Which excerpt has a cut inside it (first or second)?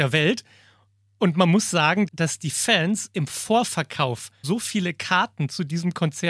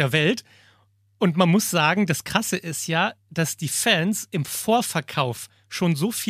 first